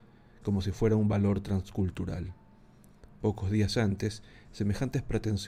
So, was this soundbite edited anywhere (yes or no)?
no